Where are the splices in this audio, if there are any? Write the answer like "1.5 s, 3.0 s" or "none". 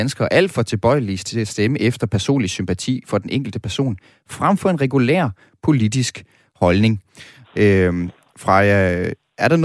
7.4 s